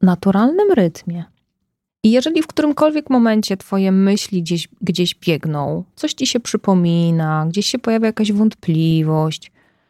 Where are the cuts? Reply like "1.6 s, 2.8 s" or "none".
1.9 s